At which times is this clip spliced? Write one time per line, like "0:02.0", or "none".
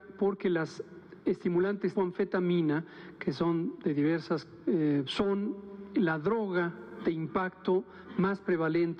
0:01.9
0:05.0